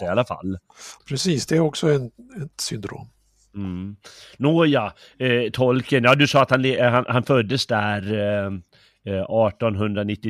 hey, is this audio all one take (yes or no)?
no